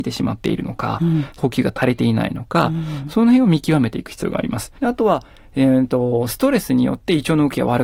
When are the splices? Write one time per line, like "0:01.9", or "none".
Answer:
0:04.8